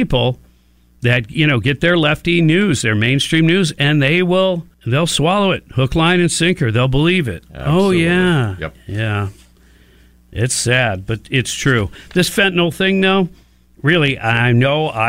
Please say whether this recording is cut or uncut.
cut